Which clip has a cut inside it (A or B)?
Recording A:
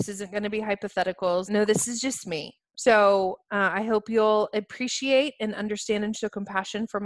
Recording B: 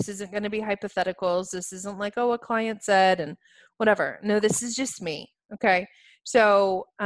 A